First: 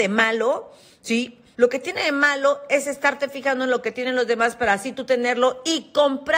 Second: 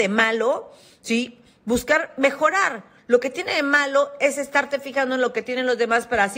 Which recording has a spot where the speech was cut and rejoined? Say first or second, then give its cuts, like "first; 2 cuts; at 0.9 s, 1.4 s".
first; 1 cut; at 1.5 s